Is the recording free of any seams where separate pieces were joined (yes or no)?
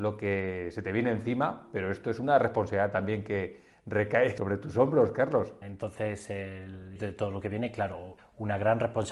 no